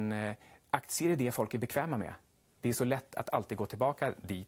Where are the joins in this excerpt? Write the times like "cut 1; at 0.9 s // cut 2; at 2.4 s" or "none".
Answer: none